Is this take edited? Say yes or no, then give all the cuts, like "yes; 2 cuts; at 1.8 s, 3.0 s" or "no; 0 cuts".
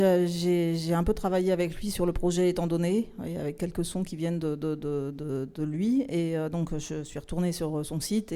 no; 0 cuts